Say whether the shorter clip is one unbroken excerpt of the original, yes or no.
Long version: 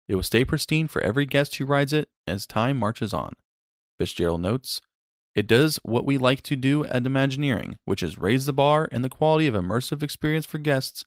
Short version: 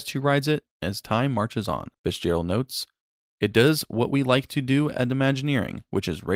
no